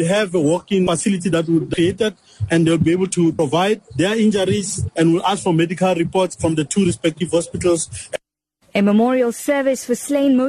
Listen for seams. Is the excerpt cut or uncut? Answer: cut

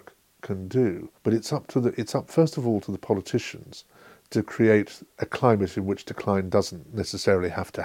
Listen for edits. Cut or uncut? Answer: uncut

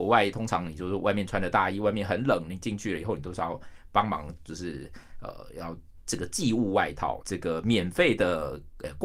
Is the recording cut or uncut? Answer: cut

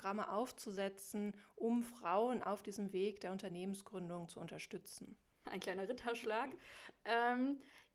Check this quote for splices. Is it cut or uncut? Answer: cut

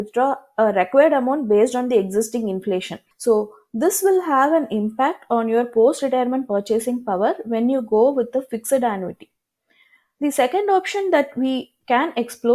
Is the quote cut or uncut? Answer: cut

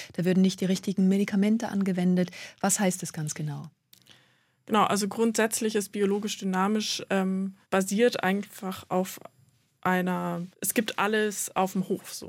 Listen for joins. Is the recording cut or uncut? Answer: cut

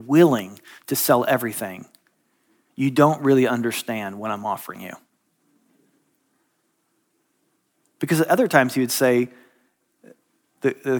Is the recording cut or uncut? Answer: uncut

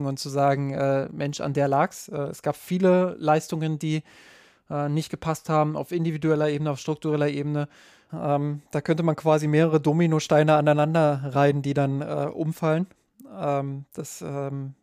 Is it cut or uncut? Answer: cut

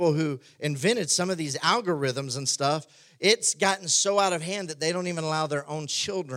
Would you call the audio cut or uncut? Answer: uncut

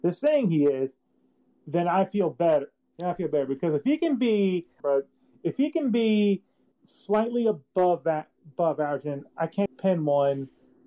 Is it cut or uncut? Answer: cut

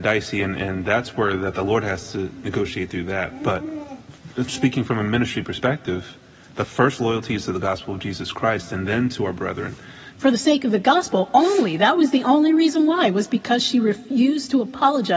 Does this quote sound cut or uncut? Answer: cut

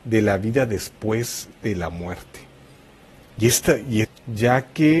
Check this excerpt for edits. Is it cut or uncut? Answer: cut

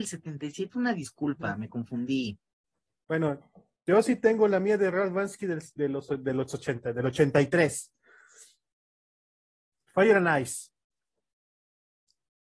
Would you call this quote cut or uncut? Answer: uncut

